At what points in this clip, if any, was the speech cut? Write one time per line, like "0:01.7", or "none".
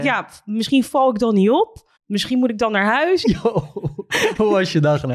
0:02.0
0:03.2